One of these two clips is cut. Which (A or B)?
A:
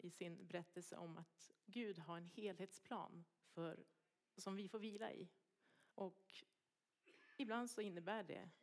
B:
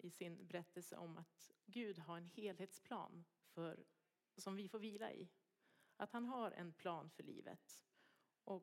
A